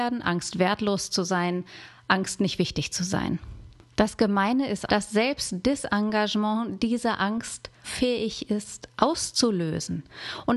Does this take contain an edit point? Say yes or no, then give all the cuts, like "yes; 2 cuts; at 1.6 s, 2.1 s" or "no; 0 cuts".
yes; 2 cuts; at 4.9 s, 7.8 s